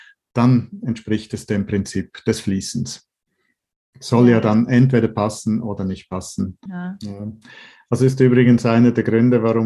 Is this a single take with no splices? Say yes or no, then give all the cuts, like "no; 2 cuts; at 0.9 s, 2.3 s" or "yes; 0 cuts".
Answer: no; 1 cut; at 6.7 s